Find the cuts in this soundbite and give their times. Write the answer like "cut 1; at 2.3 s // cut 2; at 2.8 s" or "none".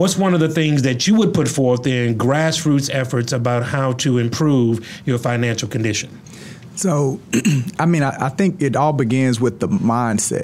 none